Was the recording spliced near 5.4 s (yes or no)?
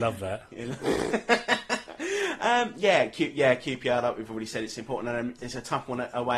yes